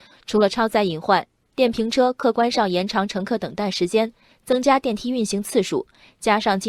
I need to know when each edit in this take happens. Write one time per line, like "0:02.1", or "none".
none